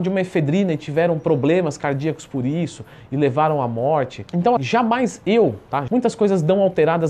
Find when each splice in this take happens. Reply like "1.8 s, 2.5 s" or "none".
4.6 s, 5.9 s

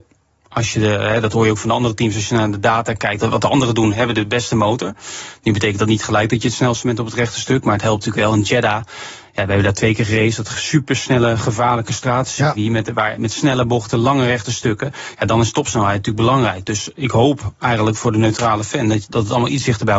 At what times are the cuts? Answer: 3.2 s

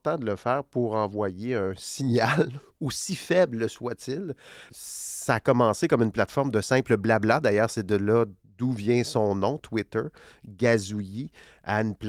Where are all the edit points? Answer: 4.7 s

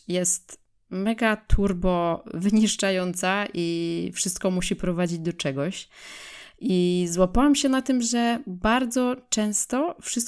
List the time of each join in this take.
none

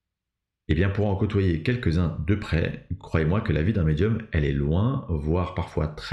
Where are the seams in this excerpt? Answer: none

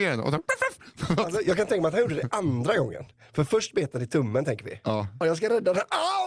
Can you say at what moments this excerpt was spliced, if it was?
5.2 s

